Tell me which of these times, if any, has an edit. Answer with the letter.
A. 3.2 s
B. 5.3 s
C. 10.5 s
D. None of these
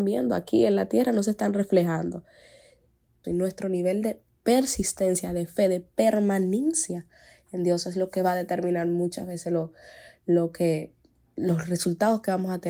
A